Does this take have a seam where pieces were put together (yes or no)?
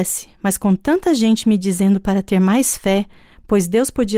no